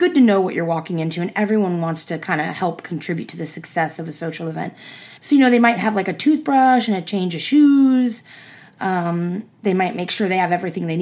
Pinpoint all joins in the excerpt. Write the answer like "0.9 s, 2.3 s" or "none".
5.2 s